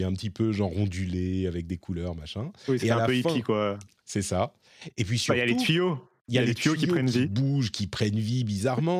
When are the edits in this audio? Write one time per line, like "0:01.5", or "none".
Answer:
0:04.9